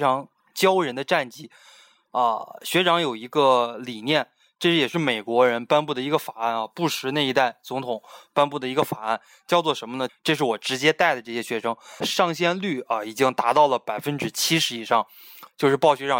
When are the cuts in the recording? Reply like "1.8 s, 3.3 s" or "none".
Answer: 10.1 s, 12.0 s